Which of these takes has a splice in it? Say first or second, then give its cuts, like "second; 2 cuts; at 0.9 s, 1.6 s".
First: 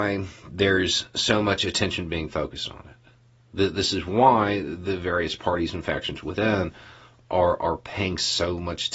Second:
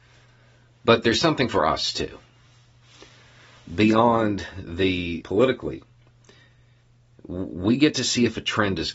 second; 1 cut; at 5.2 s